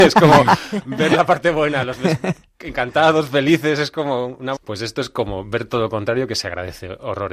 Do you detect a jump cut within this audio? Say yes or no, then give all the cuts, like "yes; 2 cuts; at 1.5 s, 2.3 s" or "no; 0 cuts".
yes; 1 cut; at 4.6 s